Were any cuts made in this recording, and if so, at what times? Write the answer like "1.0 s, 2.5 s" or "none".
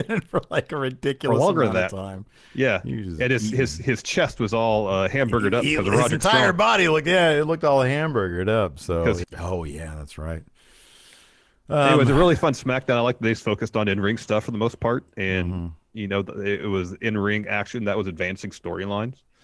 9.2 s